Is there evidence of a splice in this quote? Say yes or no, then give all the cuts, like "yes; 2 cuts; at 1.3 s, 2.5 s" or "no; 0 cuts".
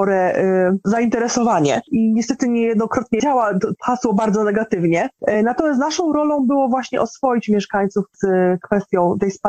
no; 0 cuts